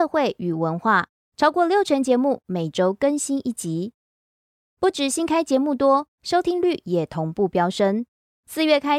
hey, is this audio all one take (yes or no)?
no